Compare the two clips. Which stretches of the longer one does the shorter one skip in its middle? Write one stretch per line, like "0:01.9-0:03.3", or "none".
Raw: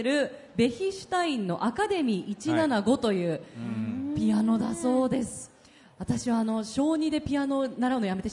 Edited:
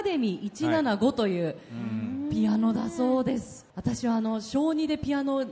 0:05.6-0:05.9